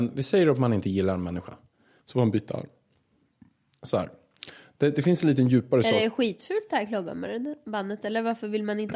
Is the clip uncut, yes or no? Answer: no